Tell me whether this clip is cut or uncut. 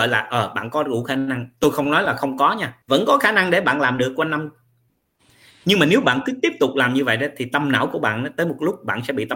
cut